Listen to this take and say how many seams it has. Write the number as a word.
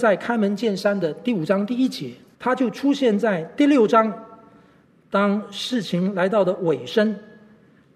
one